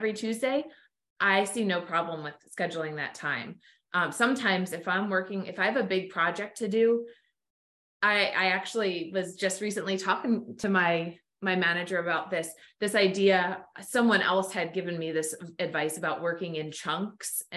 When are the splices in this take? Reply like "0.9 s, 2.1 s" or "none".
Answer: none

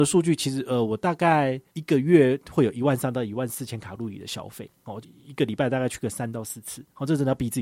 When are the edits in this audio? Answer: 1.7 s, 5.0 s

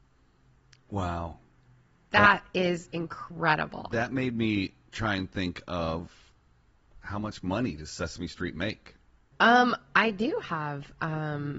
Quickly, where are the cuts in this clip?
9.3 s

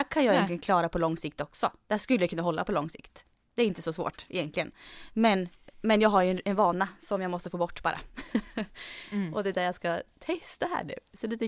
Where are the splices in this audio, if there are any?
none

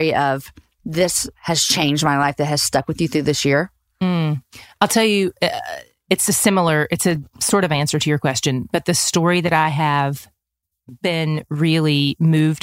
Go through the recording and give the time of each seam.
none

